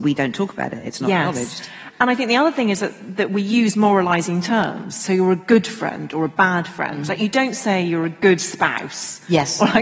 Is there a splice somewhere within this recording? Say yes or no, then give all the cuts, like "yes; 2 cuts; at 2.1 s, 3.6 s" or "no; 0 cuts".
no; 0 cuts